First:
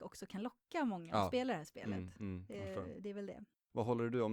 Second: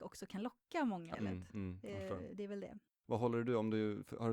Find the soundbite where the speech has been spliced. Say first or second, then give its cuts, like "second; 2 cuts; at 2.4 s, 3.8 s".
second; 1 cut; at 1.1 s